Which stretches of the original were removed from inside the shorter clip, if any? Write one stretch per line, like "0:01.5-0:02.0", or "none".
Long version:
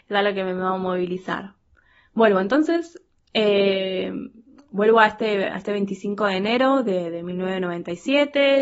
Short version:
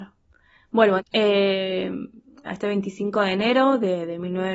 0:02.4-0:03.2
0:04.7-0:05.5

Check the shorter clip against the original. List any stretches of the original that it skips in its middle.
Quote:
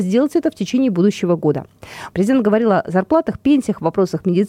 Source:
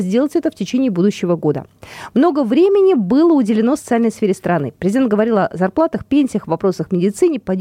0:02.1-0:04.8

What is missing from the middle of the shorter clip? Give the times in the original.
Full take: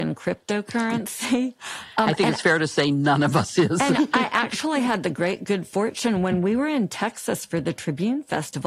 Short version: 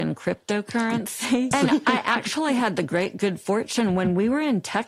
0:01.5-0:03.8

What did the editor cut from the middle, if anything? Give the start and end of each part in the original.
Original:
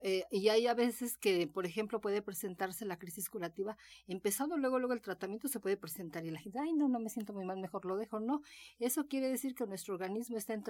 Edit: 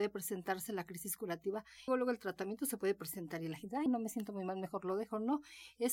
0:04.0-0:04.7
0:06.7-0:06.9

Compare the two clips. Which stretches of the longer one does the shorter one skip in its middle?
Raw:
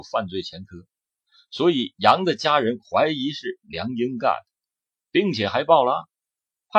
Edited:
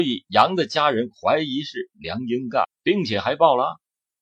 0:04.3-0:04.9

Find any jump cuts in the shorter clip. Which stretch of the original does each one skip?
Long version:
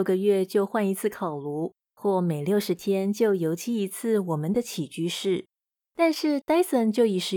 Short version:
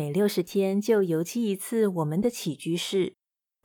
none

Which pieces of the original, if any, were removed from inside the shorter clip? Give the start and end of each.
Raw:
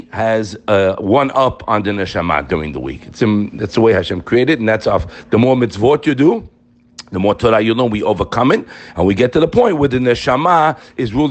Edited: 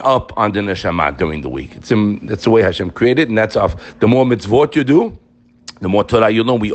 none

